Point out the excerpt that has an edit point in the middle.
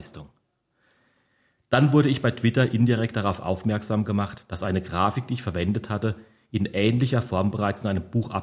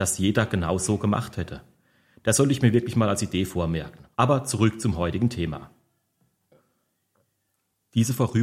second; 1 cut; at 4.1 s

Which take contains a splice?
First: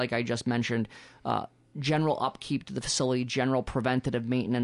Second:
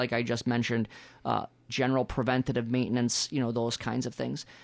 second; 1 cut; at 1.7 s

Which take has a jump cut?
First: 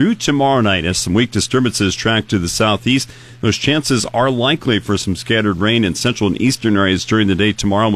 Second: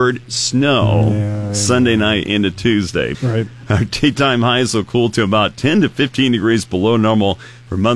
second; 1 cut; at 3.1 s

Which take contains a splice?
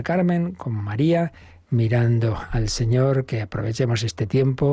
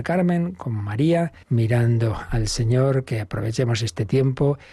second; 1 cut; at 1.4 s

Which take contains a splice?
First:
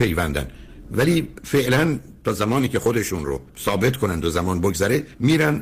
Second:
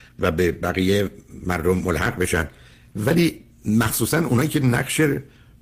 first; 1 cut; at 3.5 s

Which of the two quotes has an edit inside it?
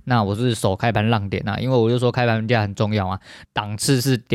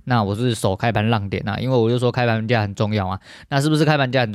first; 1 cut; at 3.4 s

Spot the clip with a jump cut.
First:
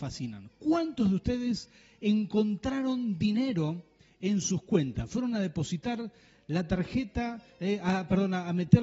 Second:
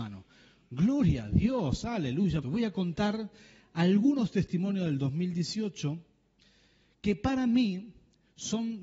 second; 1 cut; at 2.4 s

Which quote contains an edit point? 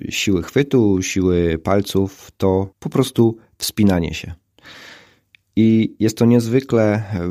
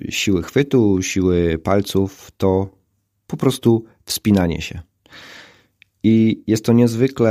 first; 1 cut; at 2.7 s

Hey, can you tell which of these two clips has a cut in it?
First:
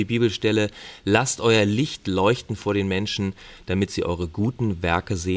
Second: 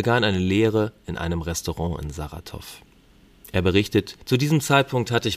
second; 1 cut; at 4.2 s

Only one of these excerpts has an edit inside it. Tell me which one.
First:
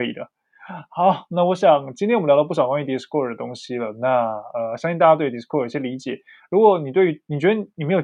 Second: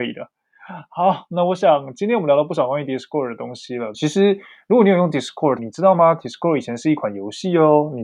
second; 2 cuts; at 3.9 s, 5.6 s

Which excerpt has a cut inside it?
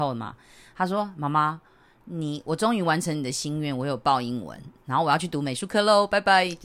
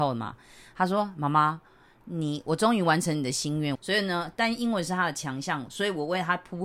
second; 2 cuts; at 3.7 s, 5.7 s

